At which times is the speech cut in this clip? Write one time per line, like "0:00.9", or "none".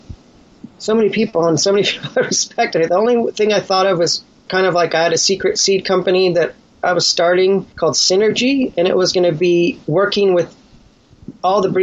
0:02.9
0:07.7
0:09.8